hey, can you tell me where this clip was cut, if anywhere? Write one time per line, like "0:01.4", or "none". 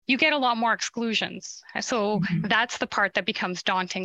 none